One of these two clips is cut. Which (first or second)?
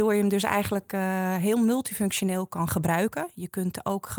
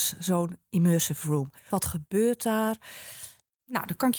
second